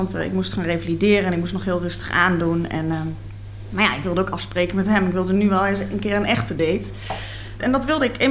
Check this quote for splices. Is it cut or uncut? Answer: uncut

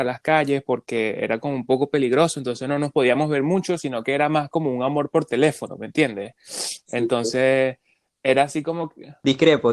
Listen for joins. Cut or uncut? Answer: uncut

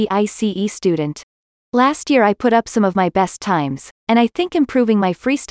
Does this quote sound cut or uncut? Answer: cut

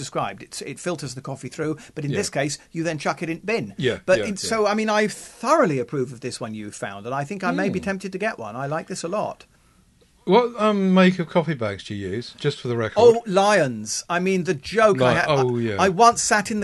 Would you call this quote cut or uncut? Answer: uncut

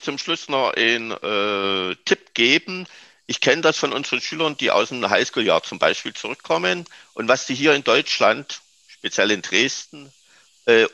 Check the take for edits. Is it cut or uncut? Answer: uncut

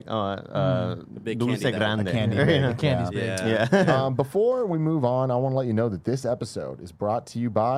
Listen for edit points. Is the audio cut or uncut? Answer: uncut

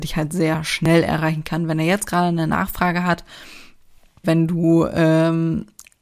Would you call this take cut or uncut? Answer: cut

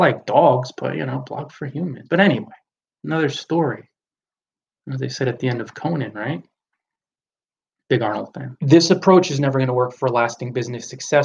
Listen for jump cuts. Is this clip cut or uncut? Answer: cut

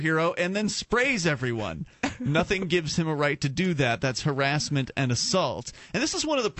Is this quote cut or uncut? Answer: uncut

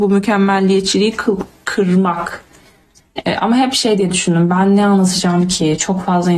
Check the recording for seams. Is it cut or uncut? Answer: cut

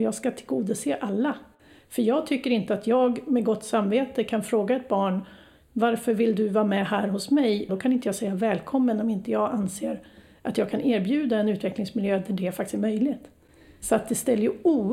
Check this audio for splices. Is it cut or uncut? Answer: cut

